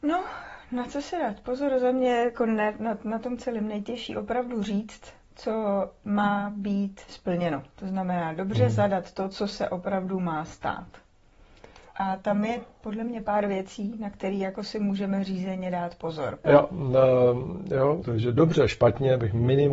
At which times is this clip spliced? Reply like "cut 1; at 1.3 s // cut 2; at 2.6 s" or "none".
cut 1; at 16.4 s // cut 2; at 18.0 s